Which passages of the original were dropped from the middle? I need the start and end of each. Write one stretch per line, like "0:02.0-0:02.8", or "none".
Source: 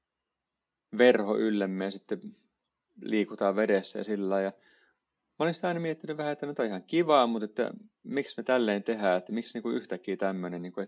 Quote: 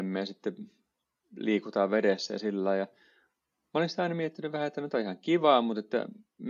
none